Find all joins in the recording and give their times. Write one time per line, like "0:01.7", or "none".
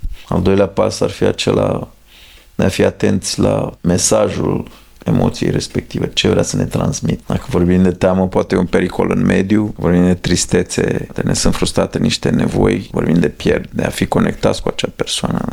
none